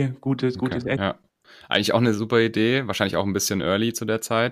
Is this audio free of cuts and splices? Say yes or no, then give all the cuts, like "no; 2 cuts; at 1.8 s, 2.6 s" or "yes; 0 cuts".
no; 1 cut; at 1.0 s